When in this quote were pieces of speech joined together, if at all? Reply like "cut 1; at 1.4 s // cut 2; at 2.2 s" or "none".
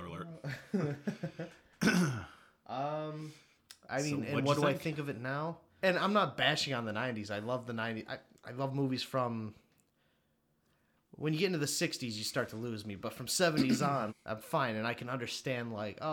cut 1; at 5.8 s // cut 2; at 14.1 s